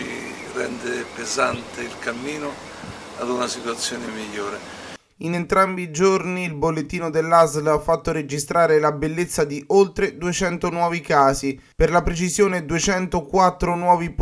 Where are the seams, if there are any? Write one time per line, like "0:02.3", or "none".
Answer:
0:05.1

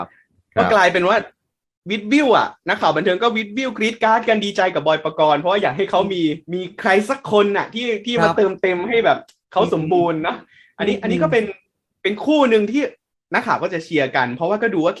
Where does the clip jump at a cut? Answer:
0:06.4

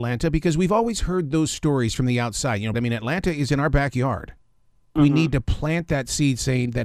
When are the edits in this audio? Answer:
0:02.7
0:05.0

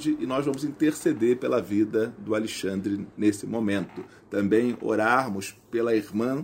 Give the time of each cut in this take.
none

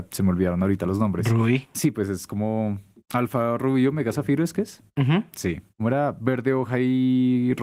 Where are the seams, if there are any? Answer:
0:05.7

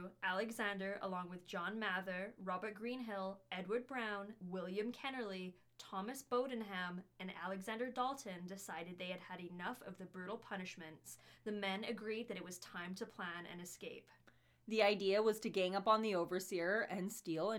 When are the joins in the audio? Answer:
0:04.4

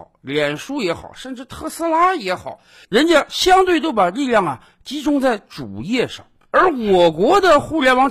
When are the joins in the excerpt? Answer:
none

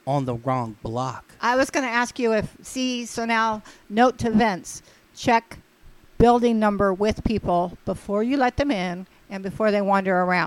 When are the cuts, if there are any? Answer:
none

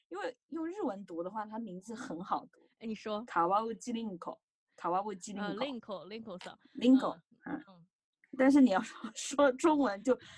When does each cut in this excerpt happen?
none

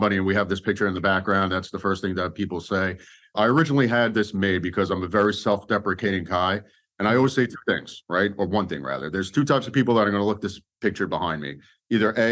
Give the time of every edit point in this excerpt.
none

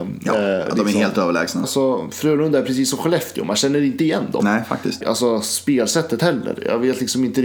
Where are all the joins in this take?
0:01.6
0:05.0

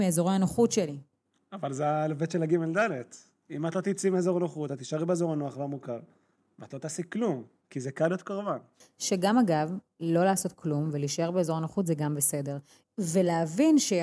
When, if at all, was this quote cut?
0:07.6
0:12.8

